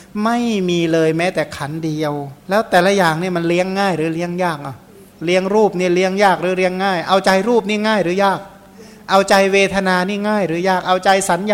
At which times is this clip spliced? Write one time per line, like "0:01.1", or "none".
0:02.4